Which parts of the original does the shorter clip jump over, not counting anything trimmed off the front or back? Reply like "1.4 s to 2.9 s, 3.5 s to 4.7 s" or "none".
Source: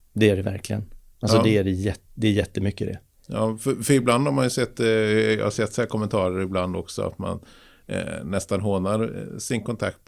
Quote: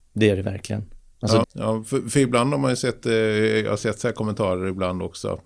1.4 s to 3.2 s